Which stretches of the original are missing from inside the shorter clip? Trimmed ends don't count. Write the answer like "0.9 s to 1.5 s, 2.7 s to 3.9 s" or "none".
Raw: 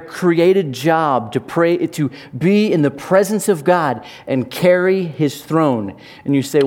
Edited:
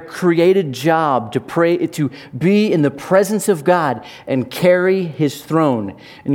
none

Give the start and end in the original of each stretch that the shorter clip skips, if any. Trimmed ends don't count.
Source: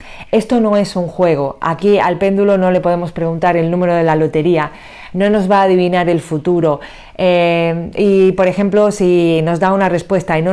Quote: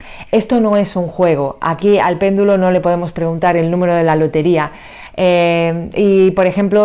5.1 s to 7.1 s

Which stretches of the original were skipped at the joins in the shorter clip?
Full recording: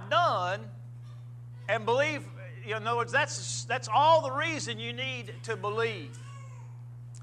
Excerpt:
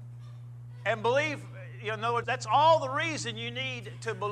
3.1 s to 3.7 s

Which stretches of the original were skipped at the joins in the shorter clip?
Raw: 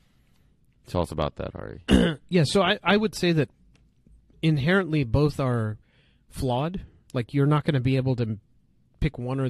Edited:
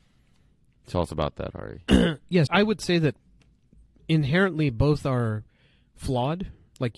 2.5 s to 2.8 s

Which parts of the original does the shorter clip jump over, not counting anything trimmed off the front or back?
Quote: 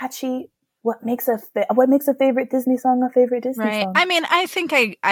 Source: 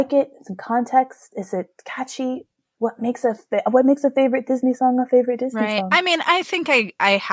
none

